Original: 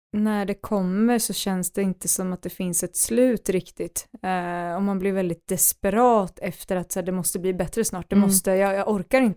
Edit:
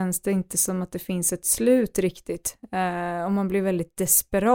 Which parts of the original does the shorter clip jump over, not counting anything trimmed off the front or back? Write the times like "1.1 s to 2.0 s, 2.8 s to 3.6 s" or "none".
none